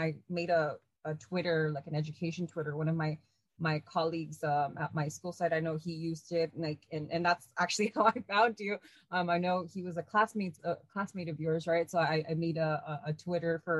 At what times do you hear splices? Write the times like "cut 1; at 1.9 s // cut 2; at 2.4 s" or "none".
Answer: none